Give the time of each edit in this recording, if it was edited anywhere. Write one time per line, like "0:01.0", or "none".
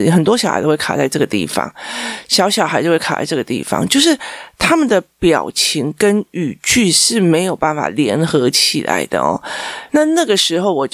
0:09.9